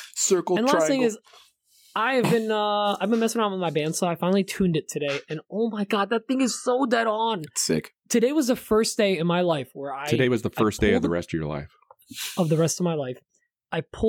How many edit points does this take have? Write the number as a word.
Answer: zero